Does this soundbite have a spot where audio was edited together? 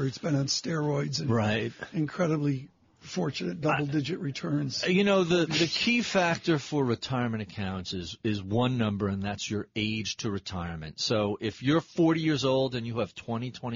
no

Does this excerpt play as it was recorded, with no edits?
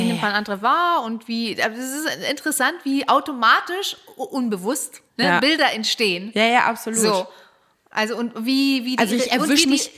no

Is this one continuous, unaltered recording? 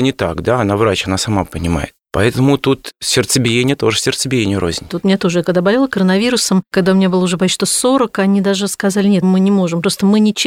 no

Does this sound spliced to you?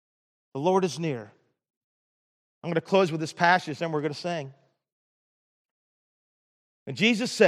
no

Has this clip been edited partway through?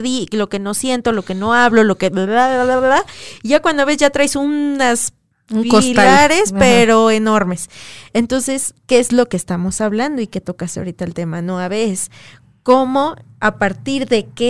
no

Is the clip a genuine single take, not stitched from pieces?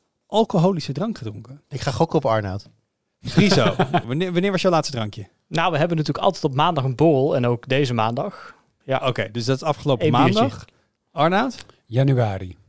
no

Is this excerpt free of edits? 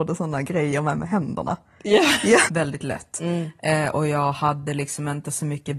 no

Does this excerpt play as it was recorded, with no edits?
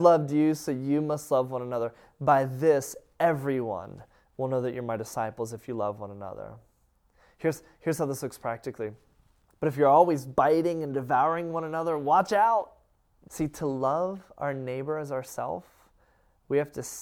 no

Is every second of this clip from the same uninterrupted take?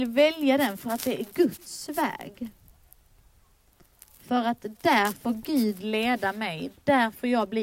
yes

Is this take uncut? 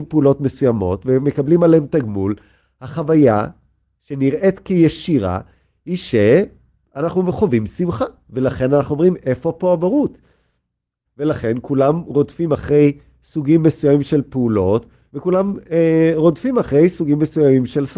no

